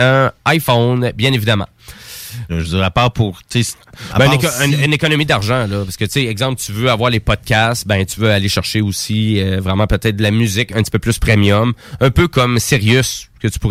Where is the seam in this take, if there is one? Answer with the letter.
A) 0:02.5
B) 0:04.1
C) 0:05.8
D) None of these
A